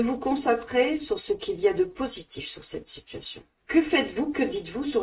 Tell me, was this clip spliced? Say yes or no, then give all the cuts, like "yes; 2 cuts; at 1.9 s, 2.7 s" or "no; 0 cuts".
yes; 1 cut; at 3.6 s